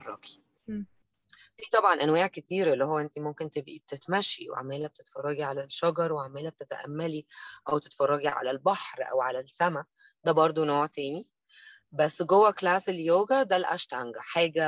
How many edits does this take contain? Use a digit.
0